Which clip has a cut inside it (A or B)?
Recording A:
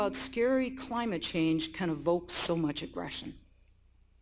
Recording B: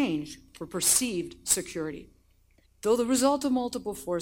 B